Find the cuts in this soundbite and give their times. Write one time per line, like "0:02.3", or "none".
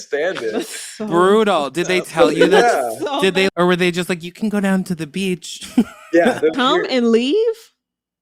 0:03.5
0:06.5